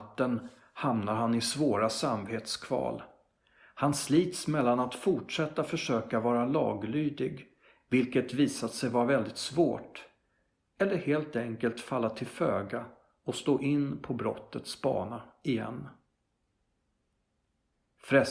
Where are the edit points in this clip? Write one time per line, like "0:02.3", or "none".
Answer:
none